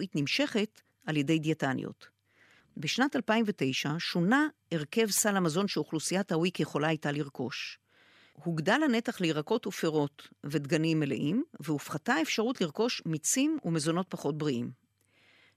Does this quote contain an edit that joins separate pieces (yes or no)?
yes